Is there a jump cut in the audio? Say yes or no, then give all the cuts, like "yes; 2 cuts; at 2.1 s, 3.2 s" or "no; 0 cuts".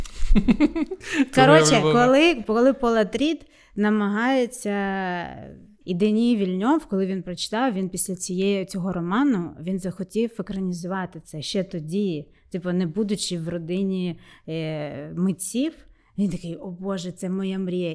yes; 1 cut; at 5.8 s